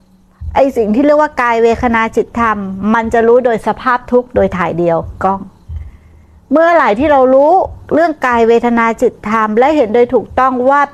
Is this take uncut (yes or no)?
yes